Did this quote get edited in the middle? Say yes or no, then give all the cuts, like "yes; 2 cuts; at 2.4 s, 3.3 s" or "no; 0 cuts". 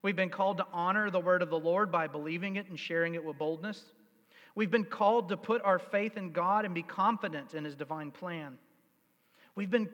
no; 0 cuts